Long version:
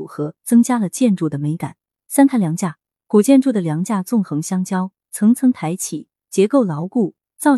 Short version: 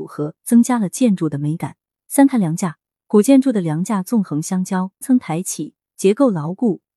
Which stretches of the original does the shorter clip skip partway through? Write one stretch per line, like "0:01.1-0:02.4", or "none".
0:05.0-0:05.3